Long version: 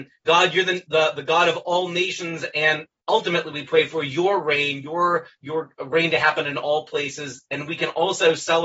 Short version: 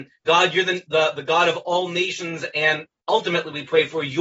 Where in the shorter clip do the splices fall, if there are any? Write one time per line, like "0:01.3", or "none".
none